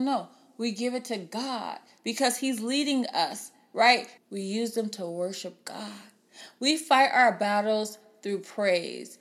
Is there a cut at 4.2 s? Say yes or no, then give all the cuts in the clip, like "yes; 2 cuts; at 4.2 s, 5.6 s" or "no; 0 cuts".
yes; 1 cut; at 4.2 s